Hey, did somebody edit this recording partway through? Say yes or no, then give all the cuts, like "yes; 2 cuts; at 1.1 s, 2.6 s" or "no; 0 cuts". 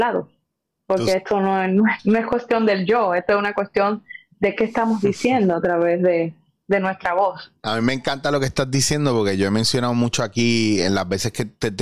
no; 0 cuts